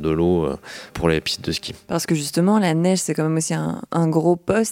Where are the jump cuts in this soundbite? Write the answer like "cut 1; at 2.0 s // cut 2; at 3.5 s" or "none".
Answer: cut 1; at 0.9 s